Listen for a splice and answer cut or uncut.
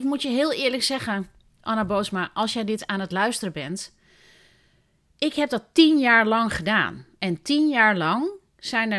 uncut